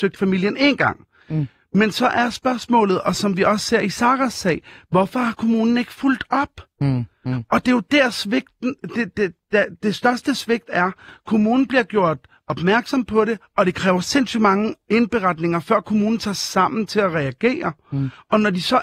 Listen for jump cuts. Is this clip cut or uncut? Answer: uncut